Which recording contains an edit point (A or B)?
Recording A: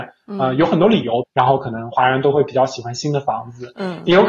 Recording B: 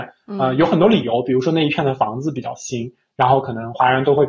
A